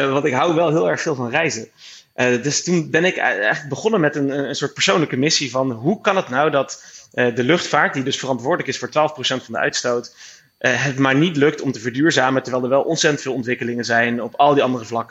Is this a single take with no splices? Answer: yes; 0 cuts

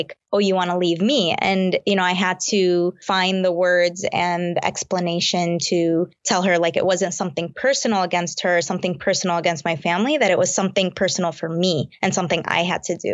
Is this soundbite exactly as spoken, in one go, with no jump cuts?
yes; 0 cuts

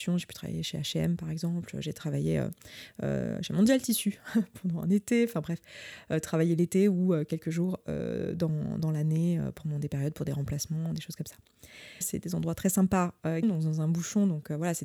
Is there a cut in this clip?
yes; 2 cuts; at 12.0 s, 13.4 s

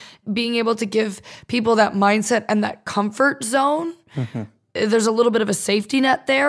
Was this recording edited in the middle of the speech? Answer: no; 0 cuts

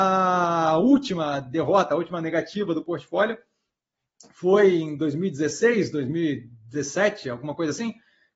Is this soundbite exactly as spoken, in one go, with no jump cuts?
yes; 0 cuts

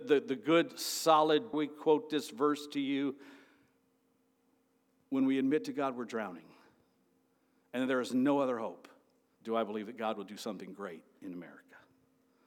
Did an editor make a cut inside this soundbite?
yes; 2 cuts; at 1.5 s, 9.4 s

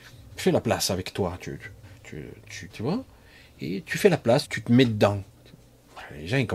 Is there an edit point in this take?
yes; 2 cuts; at 2.7 s, 4.4 s

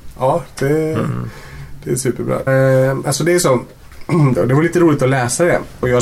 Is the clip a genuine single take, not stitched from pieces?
no; 2 cuts; at 2.5 s, 4.3 s

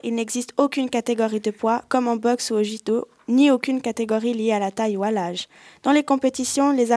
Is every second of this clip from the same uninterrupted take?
yes; 0 cuts

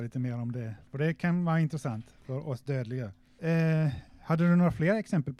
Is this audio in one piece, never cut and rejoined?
no; 1 cut; at 3.4 s

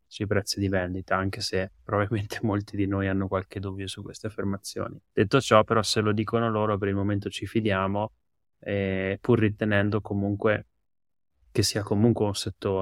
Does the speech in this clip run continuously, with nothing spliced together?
no; 1 cut; at 5.0 s

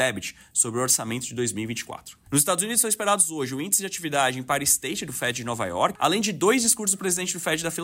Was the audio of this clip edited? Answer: yes; 2 cuts; at 2.3 s, 5.9 s

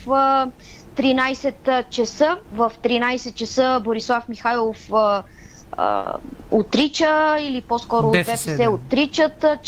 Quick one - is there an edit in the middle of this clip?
yes; 1 cut; at 2.4 s

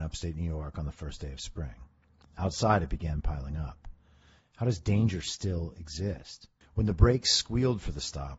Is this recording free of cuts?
no; 2 cuts; at 4.4 s, 6.6 s

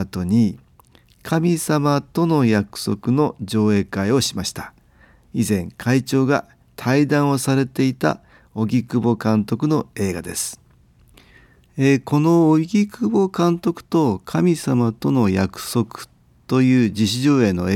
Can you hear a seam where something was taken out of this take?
no; 0 cuts

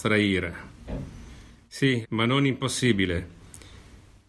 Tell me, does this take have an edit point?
yes; 1 cut; at 2.0 s

